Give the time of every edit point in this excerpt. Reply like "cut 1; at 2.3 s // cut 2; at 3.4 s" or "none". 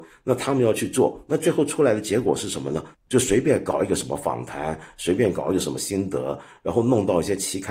cut 1; at 2.9 s